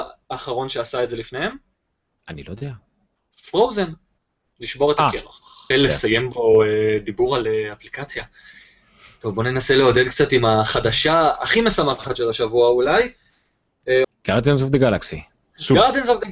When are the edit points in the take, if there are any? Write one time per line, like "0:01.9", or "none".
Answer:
0:05.7
0:14.0